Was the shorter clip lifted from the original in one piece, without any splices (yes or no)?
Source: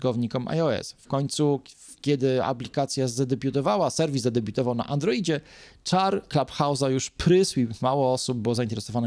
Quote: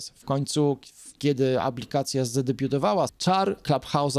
no